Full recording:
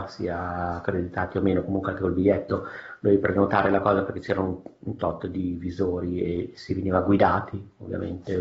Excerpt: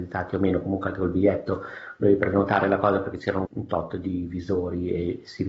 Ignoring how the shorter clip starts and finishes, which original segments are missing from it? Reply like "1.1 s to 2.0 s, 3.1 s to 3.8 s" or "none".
4.5 s to 4.8 s